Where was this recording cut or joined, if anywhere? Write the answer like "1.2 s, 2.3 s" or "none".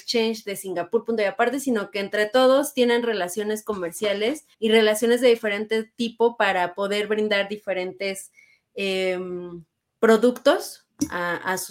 4.5 s